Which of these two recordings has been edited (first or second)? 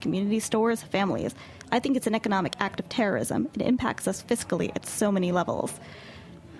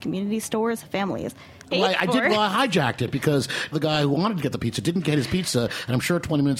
second